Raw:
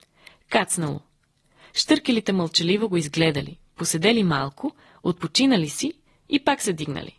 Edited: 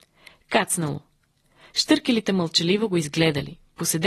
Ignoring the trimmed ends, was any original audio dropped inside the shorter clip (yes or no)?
no